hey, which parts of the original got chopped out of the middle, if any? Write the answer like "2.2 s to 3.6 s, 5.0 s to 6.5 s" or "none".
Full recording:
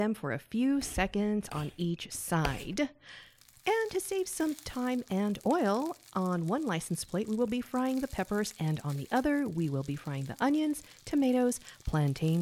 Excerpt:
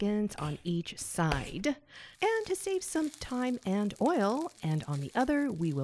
3.3 s to 3.6 s, 6.0 s to 8.5 s